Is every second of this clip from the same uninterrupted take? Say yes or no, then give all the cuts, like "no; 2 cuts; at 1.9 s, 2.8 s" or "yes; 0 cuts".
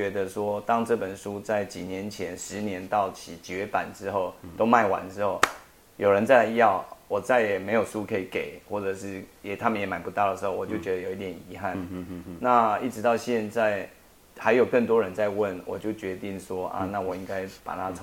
yes; 0 cuts